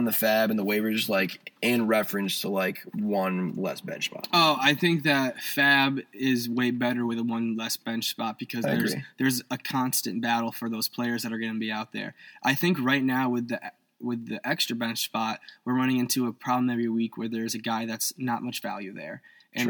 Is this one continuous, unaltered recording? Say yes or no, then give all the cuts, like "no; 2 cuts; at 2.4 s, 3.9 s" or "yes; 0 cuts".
yes; 0 cuts